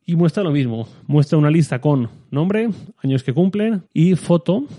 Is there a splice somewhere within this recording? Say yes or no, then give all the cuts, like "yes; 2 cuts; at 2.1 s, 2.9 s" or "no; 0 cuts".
yes; 1 cut; at 3.9 s